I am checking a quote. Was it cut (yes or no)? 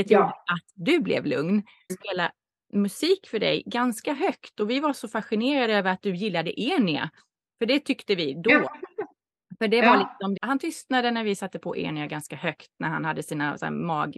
yes